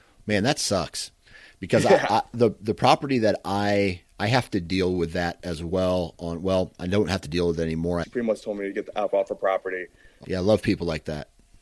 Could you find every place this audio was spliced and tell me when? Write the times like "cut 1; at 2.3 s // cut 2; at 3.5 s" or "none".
cut 1; at 8.0 s // cut 2; at 10.2 s